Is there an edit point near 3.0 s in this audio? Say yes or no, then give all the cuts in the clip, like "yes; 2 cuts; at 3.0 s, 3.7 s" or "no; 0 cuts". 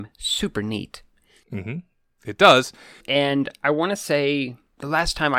yes; 1 cut; at 3.0 s